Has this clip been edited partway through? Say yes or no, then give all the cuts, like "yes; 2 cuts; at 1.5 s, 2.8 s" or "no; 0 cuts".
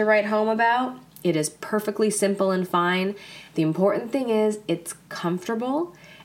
no; 0 cuts